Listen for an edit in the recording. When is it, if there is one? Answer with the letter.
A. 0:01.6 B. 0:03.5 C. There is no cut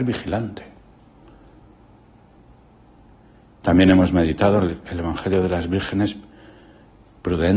C